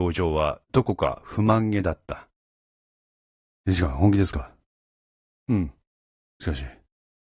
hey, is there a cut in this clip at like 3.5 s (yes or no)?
no